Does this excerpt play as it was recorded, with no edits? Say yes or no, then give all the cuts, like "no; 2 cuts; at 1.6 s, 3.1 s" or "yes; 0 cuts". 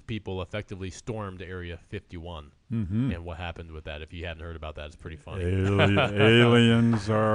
yes; 0 cuts